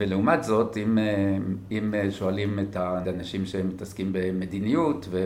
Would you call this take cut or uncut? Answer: cut